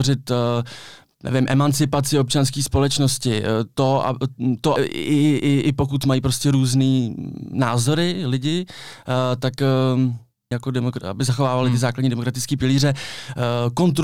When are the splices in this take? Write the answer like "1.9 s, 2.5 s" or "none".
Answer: 4.8 s, 10.5 s